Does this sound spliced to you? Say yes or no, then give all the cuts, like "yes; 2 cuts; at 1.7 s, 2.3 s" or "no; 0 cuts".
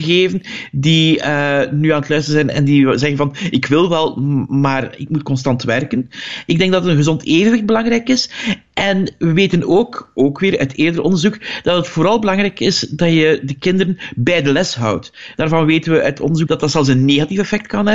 yes; 2 cuts; at 15.3 s, 16.5 s